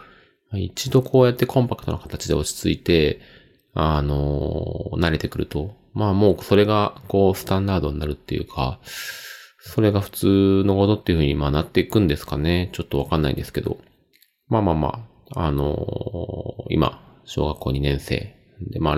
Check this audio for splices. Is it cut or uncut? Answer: uncut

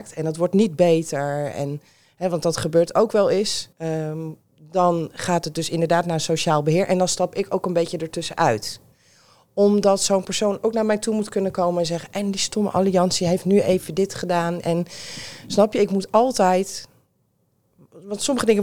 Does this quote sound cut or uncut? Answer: cut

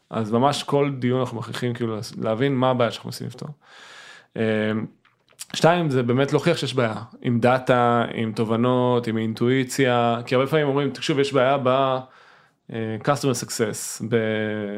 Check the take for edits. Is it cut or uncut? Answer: uncut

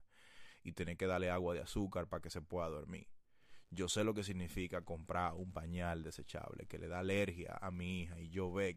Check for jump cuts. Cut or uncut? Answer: uncut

